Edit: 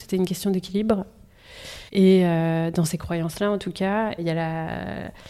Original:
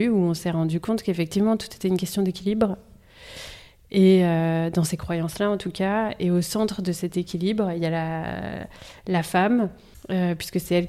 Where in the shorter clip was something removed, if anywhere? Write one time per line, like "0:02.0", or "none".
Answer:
0:01.9
0:04.2